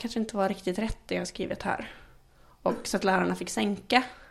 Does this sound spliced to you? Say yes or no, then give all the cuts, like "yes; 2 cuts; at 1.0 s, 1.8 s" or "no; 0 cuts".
no; 0 cuts